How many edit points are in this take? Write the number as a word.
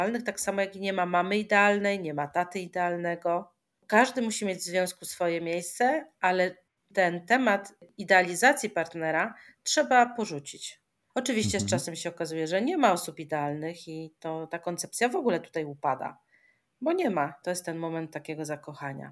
two